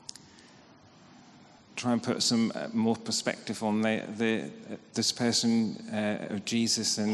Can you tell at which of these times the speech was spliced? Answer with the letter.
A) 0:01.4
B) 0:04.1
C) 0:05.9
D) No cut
D